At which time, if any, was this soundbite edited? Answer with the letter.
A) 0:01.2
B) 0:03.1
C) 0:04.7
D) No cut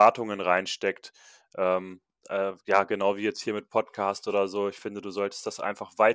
D